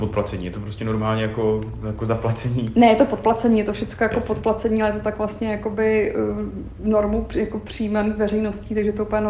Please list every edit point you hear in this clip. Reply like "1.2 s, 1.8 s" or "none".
none